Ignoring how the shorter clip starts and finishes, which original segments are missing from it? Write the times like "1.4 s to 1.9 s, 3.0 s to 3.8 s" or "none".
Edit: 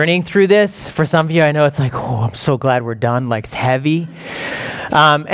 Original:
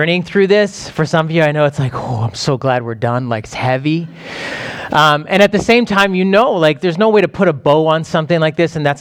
none